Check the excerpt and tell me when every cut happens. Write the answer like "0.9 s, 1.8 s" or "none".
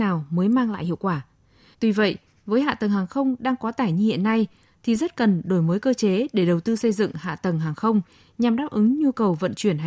1.7 s